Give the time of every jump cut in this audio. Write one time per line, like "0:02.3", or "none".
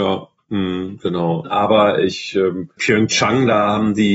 0:01.4
0:02.8